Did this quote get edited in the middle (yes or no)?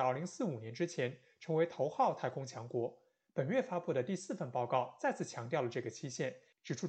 no